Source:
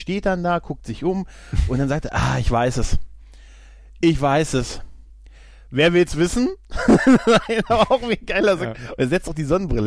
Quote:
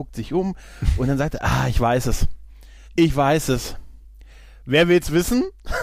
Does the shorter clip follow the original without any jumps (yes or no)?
no